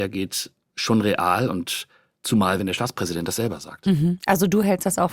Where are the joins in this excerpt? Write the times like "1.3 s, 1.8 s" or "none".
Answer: none